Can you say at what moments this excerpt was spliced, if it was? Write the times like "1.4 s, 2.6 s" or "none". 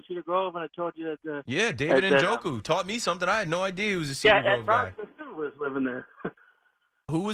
none